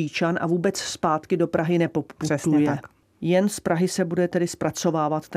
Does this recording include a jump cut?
no; 0 cuts

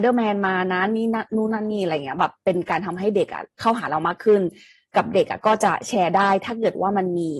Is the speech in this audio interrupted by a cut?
no; 0 cuts

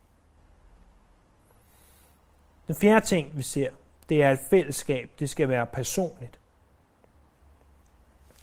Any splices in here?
no; 0 cuts

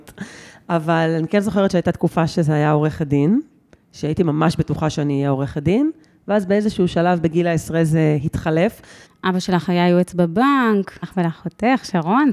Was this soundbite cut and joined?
yes; 2 cuts; at 9.1 s, 11.0 s

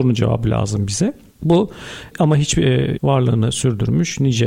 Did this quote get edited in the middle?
yes; 1 cut; at 3.0 s

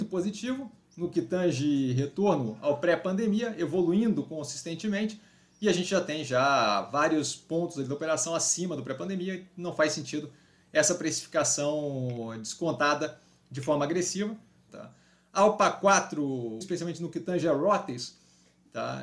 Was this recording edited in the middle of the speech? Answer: yes; 2 cuts; at 14.7 s, 16.6 s

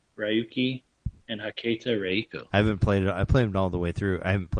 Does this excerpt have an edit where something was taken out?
yes; 1 cut; at 2.5 s

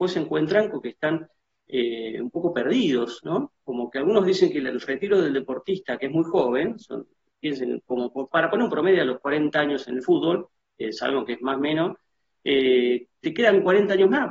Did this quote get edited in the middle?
no; 0 cuts

